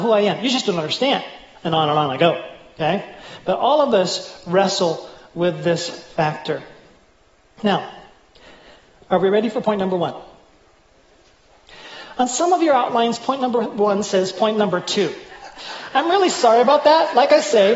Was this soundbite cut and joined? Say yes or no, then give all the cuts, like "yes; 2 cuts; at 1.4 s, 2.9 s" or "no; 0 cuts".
no; 0 cuts